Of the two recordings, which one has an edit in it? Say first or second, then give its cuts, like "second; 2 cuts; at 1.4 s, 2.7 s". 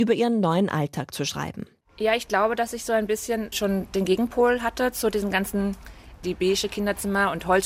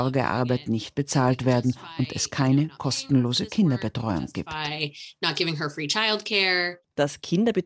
first; 2 cuts; at 3.5 s, 6.2 s